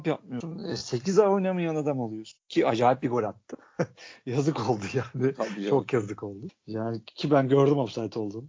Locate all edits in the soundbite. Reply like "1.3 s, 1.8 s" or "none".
none

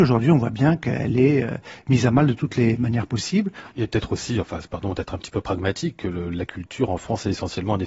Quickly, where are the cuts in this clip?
3.7 s

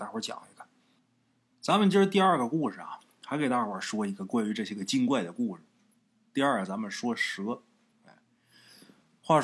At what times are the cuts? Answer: none

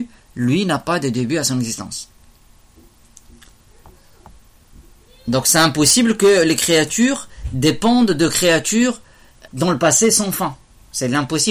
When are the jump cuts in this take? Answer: 9.5 s

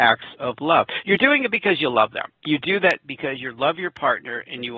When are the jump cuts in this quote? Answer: 2.3 s

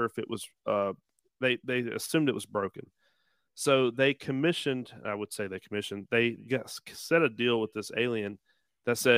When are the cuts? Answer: none

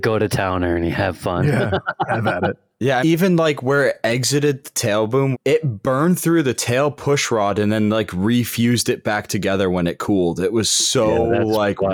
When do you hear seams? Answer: 3.0 s, 5.3 s

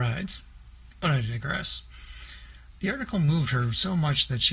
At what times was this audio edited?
none

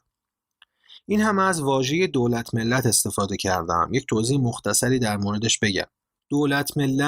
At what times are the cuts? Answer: none

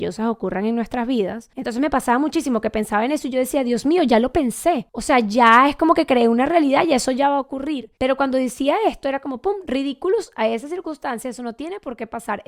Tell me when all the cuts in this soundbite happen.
none

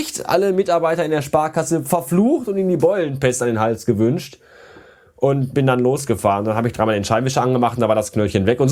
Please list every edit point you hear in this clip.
none

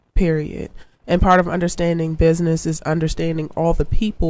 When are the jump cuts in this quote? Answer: none

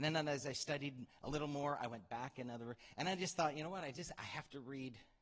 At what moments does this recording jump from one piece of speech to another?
none

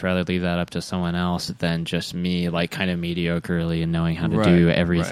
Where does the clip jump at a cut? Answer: none

